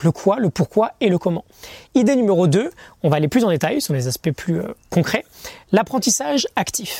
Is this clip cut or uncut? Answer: uncut